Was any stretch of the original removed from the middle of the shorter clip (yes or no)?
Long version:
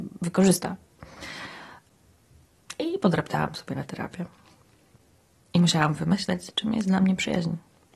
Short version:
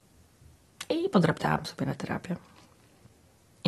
no